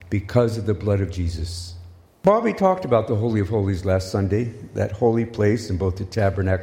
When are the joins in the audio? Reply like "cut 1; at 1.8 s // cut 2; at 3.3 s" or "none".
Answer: cut 1; at 2.1 s